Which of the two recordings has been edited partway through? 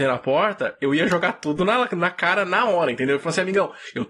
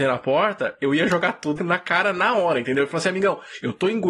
second; 1 cut; at 1.6 s

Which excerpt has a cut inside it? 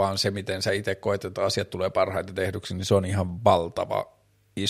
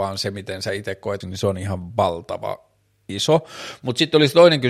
second; 1 cut; at 1.2 s

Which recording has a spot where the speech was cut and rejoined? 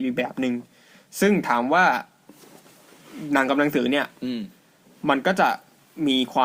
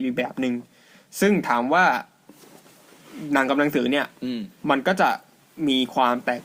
second; 1 cut; at 4.6 s

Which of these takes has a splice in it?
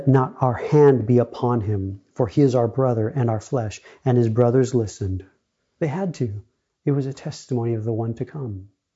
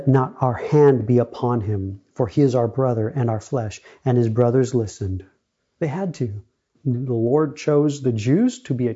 second; 1 cut; at 6.7 s

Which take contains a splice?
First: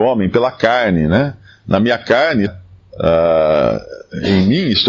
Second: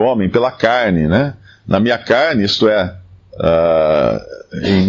first; 1 cut; at 2.5 s

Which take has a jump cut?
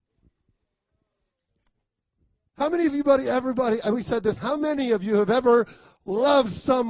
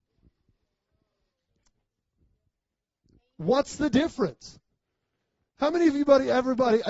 first; 2 cuts; at 2.5 s, 4.4 s

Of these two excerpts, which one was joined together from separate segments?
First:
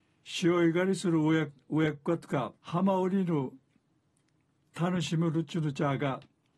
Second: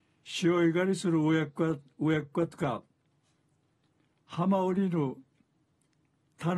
first; 2 cuts; at 1.5 s, 2.6 s

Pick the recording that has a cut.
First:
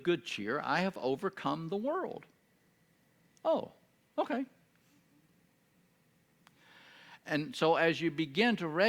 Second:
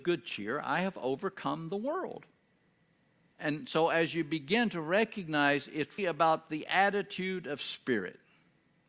second; 2 cuts; at 3.3 s, 6.0 s

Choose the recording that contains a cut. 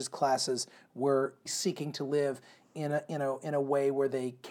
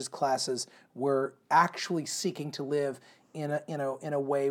first; 1 cut; at 1.5 s

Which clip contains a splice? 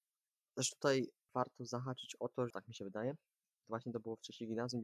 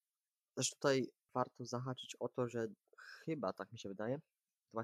first; 1 cut; at 2.5 s

